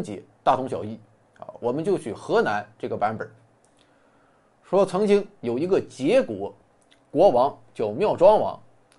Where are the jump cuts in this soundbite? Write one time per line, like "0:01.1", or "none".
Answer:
none